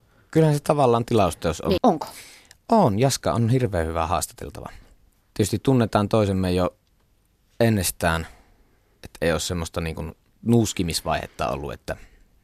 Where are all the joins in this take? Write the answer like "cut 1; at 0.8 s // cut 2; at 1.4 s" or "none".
cut 1; at 1.8 s